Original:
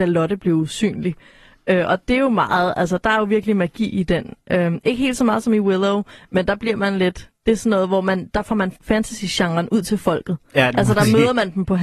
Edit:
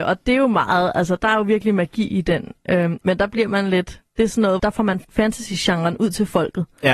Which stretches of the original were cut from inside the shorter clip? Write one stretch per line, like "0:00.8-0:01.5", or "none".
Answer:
0:04.8-0:06.3
0:07.9-0:08.3